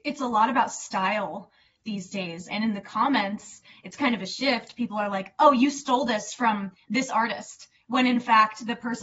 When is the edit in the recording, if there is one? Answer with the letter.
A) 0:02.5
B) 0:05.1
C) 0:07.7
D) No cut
A